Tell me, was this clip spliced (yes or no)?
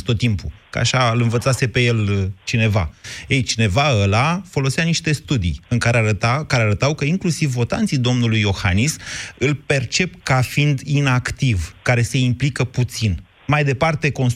no